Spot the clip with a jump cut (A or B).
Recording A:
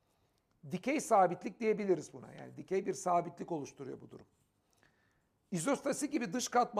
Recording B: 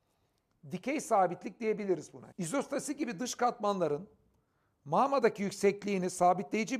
B